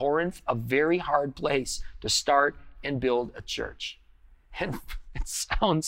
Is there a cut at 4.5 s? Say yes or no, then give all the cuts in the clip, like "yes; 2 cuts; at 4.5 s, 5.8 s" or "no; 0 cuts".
no; 0 cuts